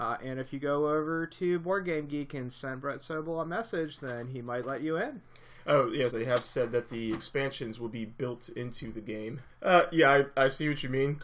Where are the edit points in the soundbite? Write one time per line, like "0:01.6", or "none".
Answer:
0:06.1
0:09.5